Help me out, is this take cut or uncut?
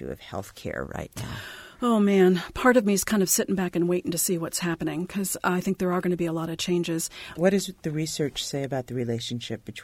cut